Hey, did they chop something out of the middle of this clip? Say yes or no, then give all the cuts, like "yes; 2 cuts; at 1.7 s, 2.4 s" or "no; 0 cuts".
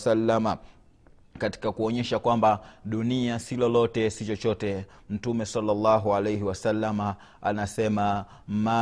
yes; 1 cut; at 1.4 s